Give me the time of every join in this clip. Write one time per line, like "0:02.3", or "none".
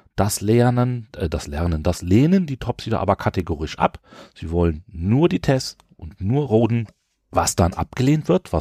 none